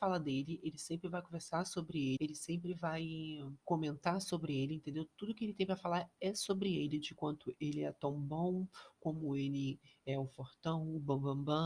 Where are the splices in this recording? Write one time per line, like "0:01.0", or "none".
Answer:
0:02.2
0:03.6